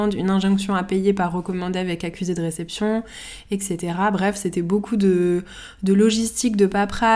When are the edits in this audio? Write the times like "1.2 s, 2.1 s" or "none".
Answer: none